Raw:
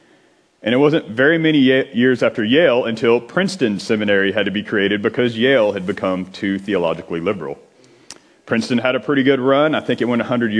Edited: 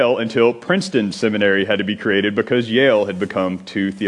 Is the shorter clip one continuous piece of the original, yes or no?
yes